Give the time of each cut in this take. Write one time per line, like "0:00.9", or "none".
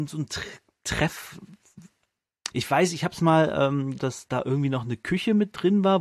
0:02.5
0:04.0